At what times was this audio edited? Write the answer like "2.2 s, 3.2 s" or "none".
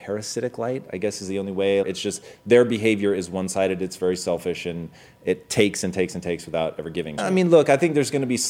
1.8 s, 7.2 s